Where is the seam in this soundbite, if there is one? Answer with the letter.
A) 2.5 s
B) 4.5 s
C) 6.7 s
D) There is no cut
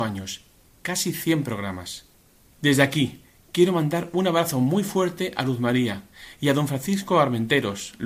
A